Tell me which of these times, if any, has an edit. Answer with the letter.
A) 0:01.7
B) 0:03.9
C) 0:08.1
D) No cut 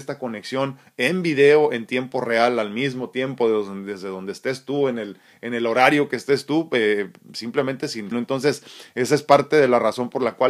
C